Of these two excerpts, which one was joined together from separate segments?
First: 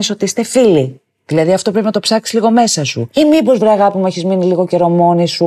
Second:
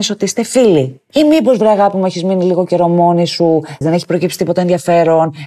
second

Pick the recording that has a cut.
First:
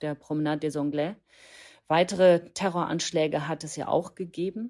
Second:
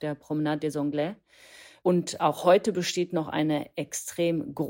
second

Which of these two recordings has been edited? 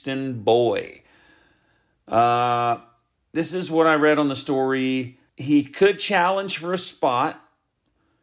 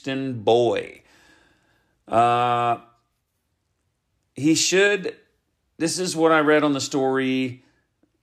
first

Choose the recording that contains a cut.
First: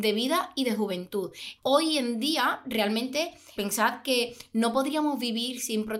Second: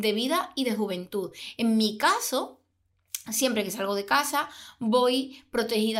first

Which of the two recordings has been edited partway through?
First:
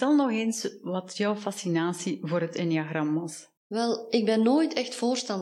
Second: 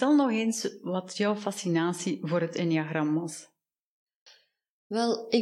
first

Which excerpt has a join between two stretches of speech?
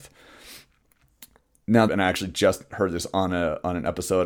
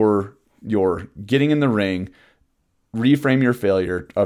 first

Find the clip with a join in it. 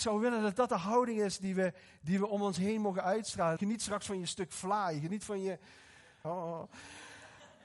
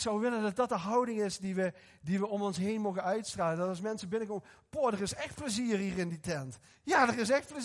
first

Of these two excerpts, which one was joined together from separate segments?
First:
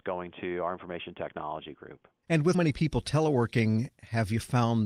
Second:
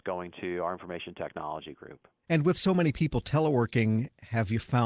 first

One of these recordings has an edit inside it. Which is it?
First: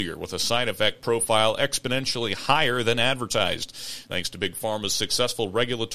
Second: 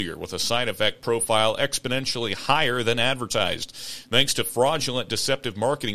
first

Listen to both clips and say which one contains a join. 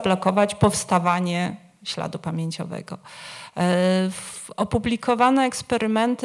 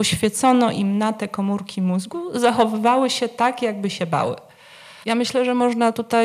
second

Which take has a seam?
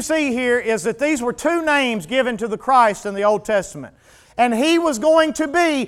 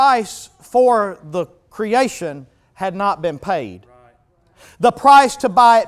first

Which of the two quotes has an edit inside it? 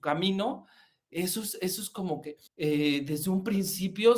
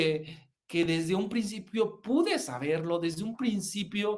first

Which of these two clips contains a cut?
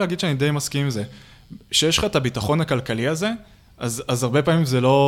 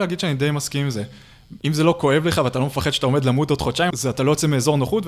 second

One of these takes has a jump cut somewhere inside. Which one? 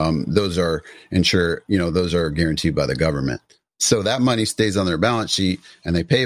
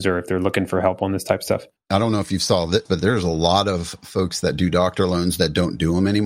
second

